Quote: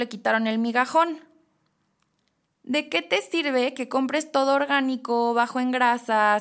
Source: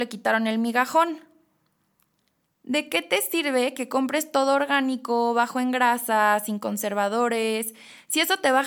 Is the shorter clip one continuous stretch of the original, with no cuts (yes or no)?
yes